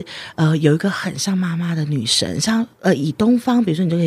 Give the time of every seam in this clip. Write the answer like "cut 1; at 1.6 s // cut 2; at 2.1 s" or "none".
none

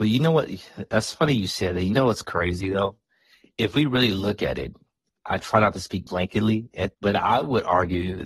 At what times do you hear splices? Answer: cut 1; at 6.9 s

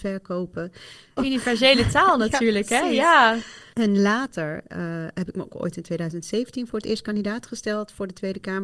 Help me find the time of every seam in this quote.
cut 1; at 1.2 s // cut 2; at 3.7 s

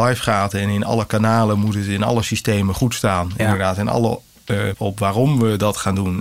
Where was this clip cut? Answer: cut 1; at 4.7 s

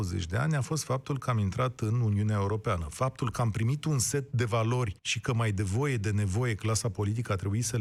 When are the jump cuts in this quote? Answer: cut 1; at 5.0 s

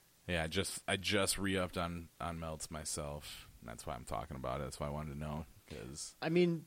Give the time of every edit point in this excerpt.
none

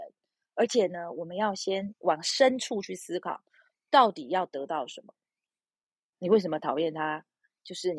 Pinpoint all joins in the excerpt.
cut 1; at 6.1 s

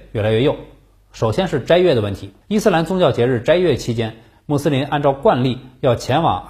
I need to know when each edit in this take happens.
cut 1; at 1.0 s // cut 2; at 2.4 s

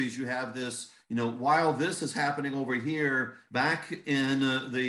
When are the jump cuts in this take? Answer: cut 1; at 3.5 s

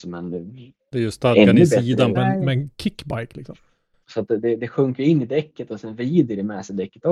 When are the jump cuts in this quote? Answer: cut 1; at 2.1 s // cut 2; at 4.0 s

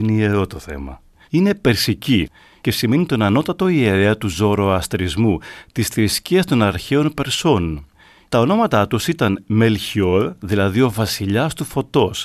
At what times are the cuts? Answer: cut 1; at 1.2 s

